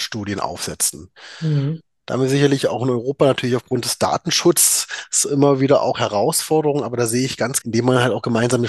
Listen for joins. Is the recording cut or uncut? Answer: cut